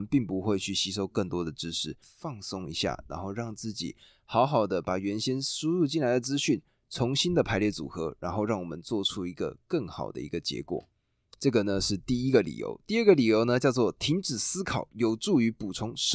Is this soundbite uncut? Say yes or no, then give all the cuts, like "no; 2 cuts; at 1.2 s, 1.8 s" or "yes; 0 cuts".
no; 1 cut; at 2.0 s